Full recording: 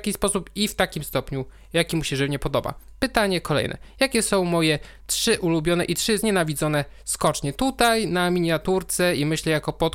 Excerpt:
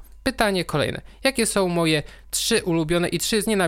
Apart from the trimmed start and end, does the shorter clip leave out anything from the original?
no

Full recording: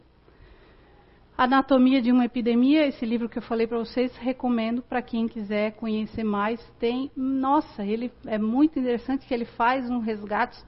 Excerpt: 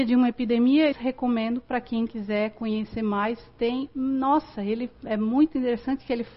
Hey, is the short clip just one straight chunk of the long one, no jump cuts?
no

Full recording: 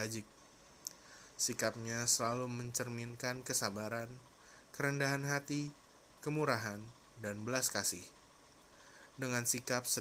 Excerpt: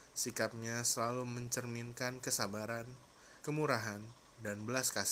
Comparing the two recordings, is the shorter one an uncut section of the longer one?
no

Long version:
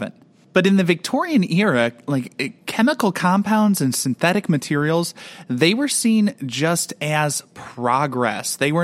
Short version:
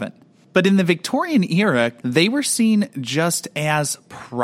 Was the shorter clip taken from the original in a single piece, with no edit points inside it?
no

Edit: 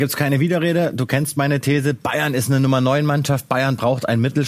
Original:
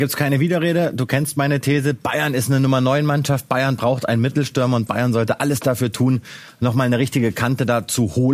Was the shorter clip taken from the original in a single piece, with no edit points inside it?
yes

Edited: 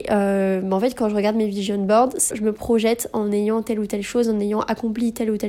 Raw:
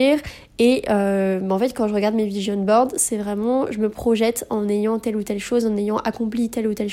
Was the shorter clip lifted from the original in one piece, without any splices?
no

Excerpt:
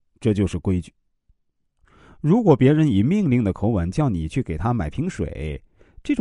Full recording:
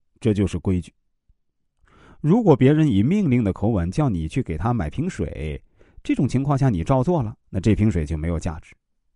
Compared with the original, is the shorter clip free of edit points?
yes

